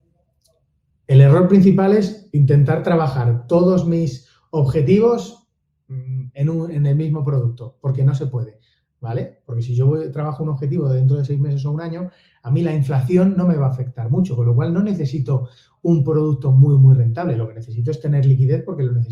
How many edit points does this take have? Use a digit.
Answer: 0